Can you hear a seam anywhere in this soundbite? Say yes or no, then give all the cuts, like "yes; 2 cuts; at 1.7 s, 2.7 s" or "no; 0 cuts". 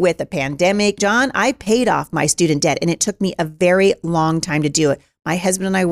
yes; 1 cut; at 1.0 s